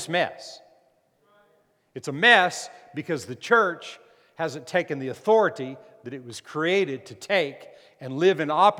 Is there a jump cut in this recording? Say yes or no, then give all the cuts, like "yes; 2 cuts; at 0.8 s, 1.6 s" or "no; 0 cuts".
no; 0 cuts